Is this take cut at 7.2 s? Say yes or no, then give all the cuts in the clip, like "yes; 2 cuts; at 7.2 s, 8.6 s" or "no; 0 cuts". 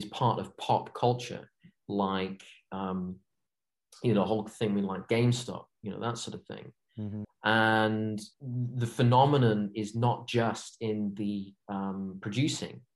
yes; 3 cuts; at 7.2 s, 8.3 s, 11.6 s